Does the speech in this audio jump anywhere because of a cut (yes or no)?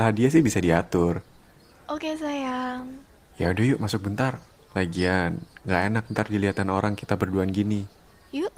yes